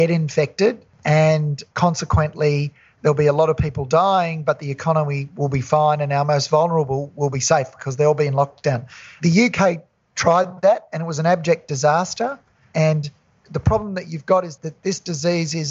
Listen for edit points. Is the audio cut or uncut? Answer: cut